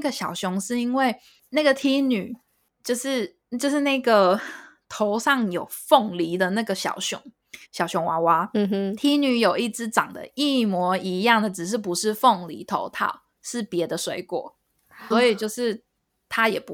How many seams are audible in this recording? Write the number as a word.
two